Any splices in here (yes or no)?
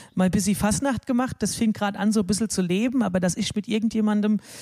no